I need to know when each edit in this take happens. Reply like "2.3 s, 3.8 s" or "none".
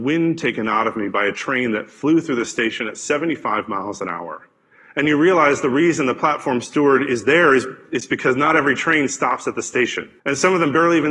10.2 s